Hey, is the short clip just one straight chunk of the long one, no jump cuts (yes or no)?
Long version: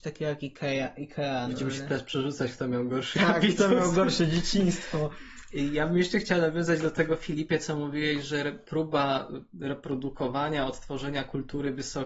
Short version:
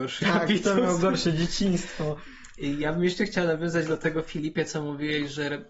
yes